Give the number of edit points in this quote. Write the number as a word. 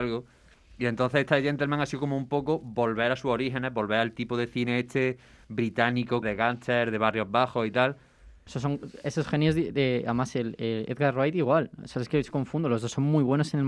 two